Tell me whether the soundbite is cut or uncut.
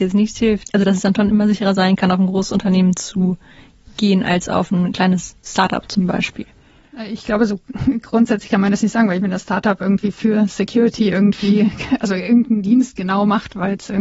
uncut